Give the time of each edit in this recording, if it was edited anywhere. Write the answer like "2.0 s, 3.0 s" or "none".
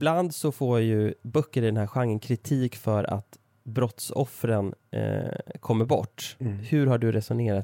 none